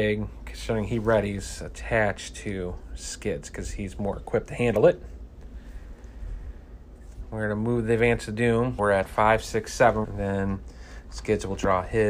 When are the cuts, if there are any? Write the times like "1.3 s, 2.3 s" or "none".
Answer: 8.8 s, 10.0 s

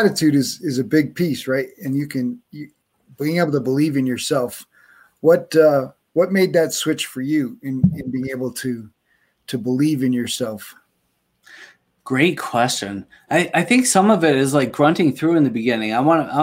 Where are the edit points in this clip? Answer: none

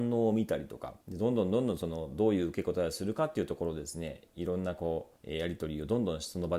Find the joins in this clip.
1.0 s, 5.2 s

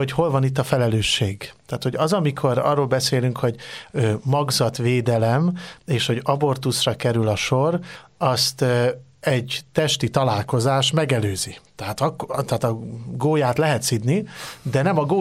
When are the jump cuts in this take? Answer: none

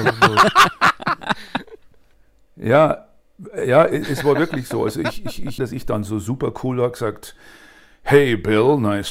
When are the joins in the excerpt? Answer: 5.6 s

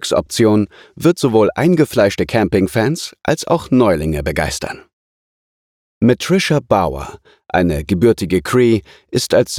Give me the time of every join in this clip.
5.9 s

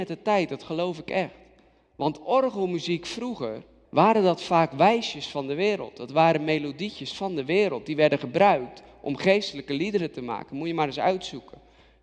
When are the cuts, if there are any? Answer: 3.8 s

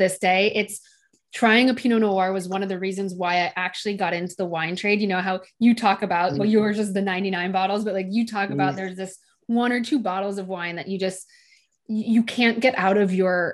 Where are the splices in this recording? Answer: none

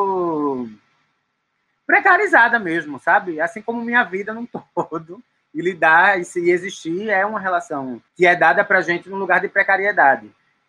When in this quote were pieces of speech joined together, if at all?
8.1 s

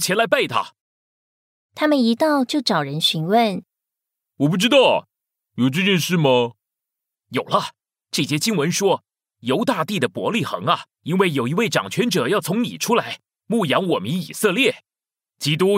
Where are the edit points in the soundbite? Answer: 7.1 s, 10.9 s

